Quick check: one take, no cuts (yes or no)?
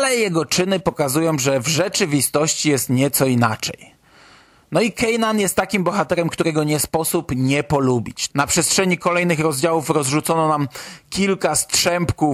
no